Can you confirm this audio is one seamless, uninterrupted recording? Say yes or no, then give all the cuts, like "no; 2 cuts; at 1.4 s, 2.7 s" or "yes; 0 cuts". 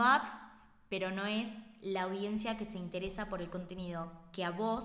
yes; 0 cuts